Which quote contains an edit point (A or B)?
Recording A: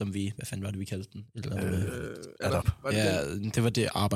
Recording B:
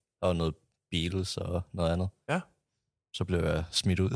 A